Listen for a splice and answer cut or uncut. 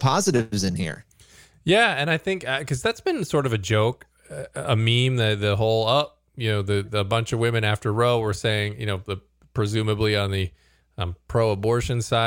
uncut